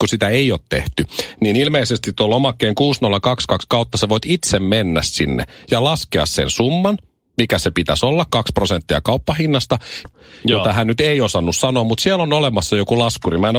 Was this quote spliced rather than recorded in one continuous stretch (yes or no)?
yes